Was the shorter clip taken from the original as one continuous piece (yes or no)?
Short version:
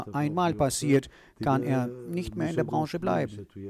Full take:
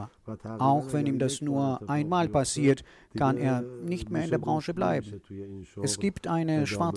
yes